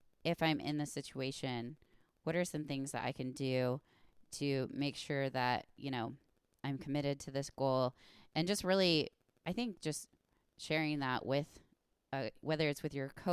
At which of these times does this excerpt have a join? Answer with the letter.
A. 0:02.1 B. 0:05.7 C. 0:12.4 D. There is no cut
C